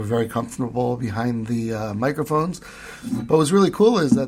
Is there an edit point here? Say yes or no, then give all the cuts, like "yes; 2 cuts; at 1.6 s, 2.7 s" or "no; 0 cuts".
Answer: no; 0 cuts